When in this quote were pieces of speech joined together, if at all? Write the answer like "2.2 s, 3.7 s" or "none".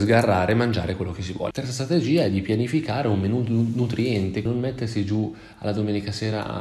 1.5 s, 4.5 s